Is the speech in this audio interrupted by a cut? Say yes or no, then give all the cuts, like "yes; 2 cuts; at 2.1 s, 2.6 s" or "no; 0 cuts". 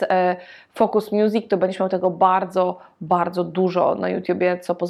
no; 0 cuts